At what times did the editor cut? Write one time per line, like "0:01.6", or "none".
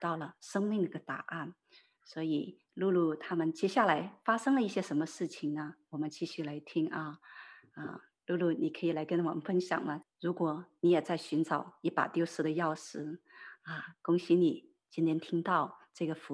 0:10.0